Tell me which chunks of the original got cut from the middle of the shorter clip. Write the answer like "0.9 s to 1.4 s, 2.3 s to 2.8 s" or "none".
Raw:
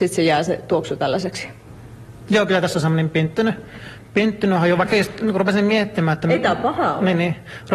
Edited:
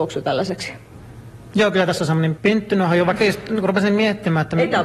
3.1 s to 4.1 s